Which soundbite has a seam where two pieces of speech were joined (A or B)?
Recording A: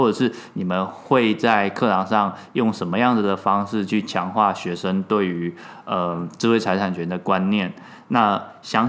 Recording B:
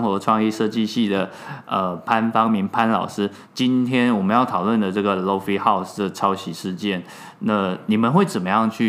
B